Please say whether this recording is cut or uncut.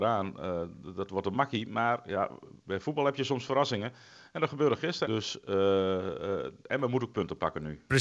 cut